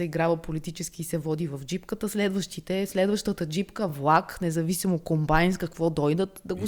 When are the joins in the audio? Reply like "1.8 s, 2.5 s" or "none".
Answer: none